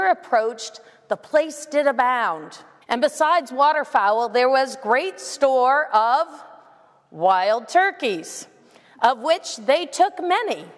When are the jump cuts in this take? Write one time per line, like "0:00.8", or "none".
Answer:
0:02.8